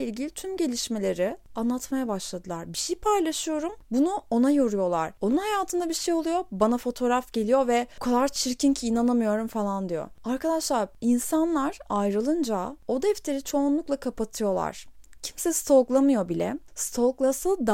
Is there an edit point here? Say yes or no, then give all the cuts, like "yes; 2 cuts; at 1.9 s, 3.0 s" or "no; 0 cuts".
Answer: yes; 1 cut; at 5.2 s